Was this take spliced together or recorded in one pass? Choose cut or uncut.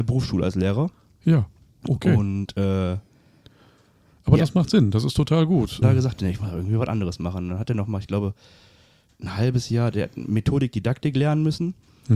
cut